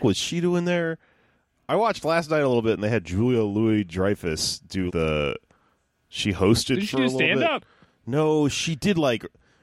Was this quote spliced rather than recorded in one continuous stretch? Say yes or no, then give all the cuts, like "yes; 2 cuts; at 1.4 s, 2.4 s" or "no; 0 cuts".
yes; 1 cut; at 4.9 s